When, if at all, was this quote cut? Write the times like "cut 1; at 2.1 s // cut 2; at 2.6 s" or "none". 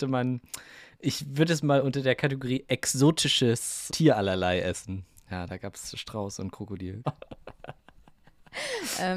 cut 1; at 3.9 s // cut 2; at 7.0 s